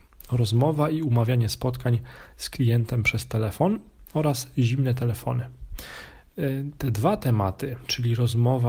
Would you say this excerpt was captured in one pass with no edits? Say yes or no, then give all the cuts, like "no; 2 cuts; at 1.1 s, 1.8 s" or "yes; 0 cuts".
yes; 0 cuts